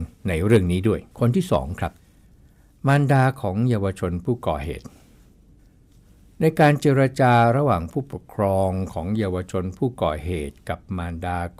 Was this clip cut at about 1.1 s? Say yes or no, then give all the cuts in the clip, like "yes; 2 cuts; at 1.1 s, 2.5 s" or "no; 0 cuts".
yes; 1 cut; at 1.1 s